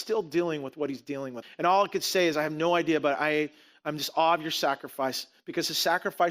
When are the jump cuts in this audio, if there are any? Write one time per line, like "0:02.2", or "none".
0:01.4